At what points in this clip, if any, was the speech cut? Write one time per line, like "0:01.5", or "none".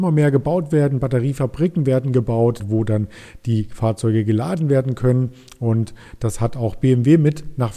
0:02.6